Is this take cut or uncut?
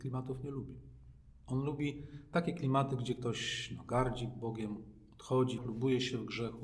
cut